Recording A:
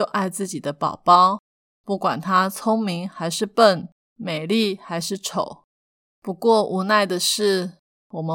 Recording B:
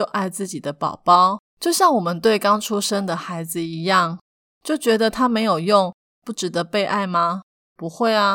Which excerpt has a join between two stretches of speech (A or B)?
B